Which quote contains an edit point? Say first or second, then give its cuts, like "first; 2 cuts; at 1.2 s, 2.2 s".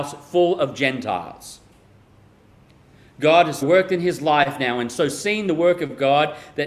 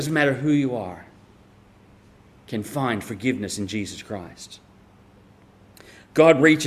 first; 1 cut; at 3.6 s